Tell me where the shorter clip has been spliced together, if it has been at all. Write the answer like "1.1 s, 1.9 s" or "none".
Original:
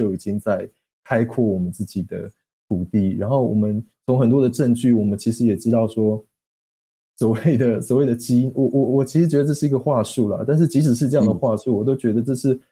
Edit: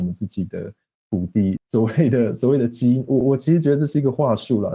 1.6 s, 3.2 s